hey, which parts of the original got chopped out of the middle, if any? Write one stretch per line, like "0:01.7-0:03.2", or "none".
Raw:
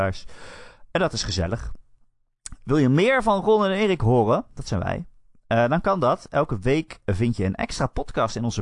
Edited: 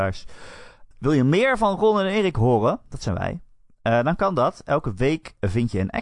0:00.9-0:02.6